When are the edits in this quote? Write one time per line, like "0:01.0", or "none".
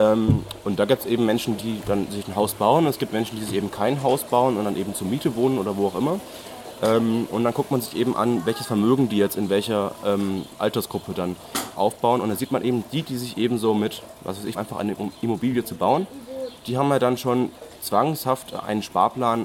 0:11.8
0:14.5